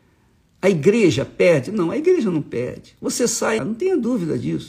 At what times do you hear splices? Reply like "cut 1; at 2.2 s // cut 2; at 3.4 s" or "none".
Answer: cut 1; at 3.6 s

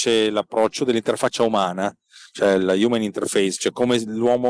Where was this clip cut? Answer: none

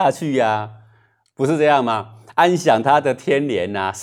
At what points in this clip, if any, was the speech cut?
none

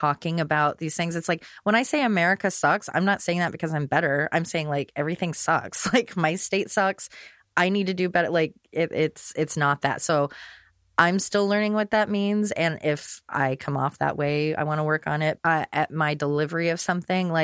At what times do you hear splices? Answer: cut 1; at 15.4 s

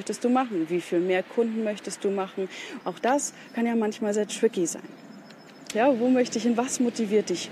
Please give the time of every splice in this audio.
cut 1; at 2.8 s // cut 2; at 5.7 s

